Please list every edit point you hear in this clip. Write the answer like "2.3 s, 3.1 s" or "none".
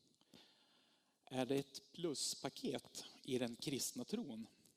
none